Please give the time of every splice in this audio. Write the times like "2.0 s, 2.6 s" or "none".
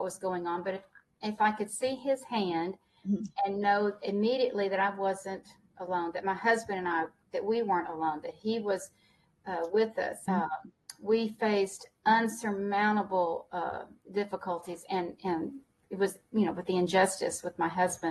10.3 s